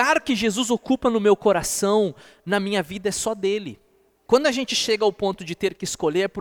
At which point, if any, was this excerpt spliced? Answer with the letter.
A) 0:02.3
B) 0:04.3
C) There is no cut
B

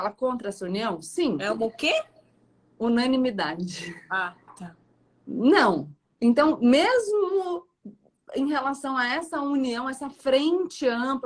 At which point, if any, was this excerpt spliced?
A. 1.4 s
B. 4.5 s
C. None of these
B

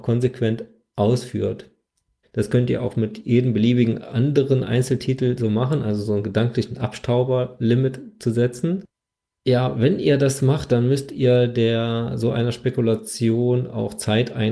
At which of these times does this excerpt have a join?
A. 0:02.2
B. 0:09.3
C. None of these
A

